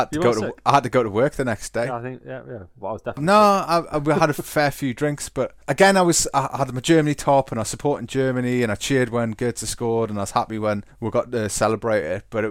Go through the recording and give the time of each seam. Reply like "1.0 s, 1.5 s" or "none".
2.8 s